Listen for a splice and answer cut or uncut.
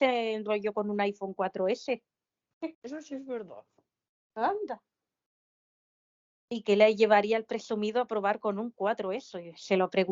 cut